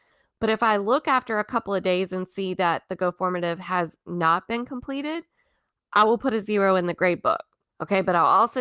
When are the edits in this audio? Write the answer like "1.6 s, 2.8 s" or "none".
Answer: 7.7 s